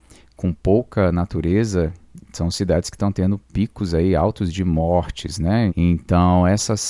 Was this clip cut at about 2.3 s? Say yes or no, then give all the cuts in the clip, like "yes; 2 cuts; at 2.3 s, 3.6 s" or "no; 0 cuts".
no; 1 cut; at 5.7 s